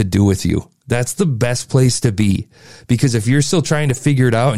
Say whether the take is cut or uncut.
uncut